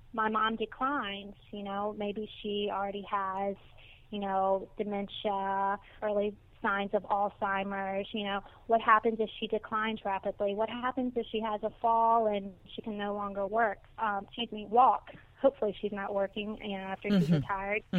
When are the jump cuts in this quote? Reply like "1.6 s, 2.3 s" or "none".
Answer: 6.0 s

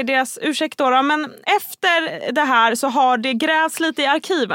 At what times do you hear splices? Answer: none

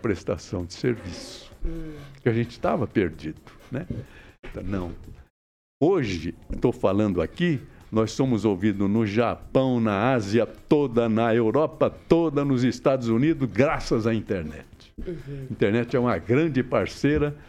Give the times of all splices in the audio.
4.5 s

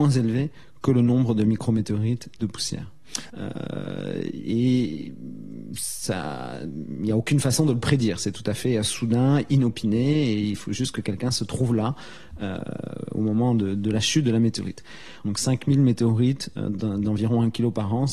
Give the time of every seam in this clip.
3.3 s, 15.2 s

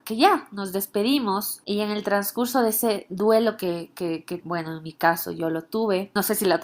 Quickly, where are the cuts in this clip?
4.4 s

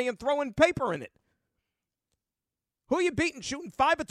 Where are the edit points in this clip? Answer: none

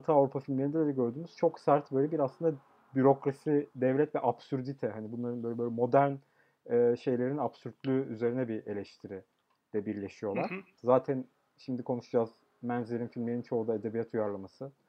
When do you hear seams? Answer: 10.8 s

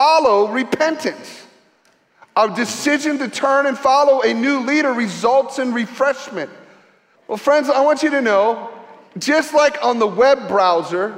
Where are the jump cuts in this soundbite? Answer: 7.1 s

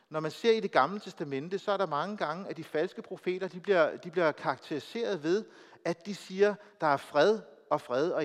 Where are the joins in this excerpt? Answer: none

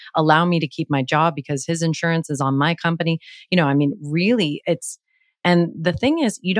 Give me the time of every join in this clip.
none

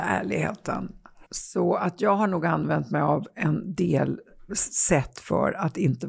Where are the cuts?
1.2 s, 4.5 s

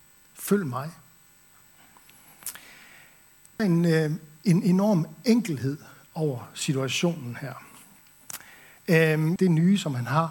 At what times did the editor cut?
3.6 s, 9.4 s

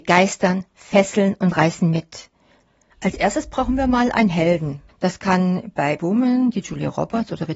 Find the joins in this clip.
2.9 s, 4.9 s, 6.0 s

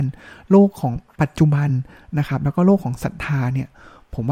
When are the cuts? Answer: none

